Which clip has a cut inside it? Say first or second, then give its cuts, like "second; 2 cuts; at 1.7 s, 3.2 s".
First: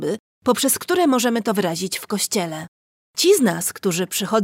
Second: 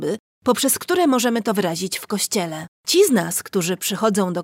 second; 1 cut; at 2.8 s